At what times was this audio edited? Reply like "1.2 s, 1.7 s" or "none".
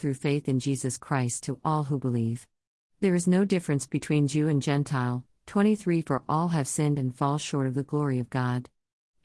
none